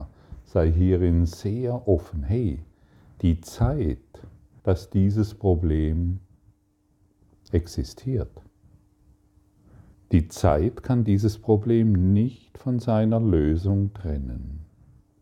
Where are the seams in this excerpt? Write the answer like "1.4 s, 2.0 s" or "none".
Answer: 4.6 s, 9.9 s